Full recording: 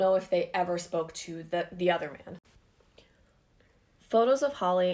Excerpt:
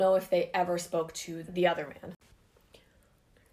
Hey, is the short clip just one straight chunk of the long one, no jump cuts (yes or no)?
no